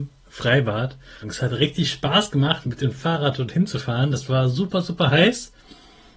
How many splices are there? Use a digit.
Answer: 1